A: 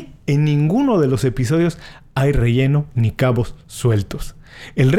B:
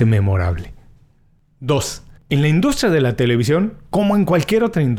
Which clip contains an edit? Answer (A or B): B